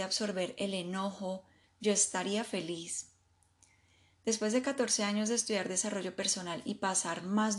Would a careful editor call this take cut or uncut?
cut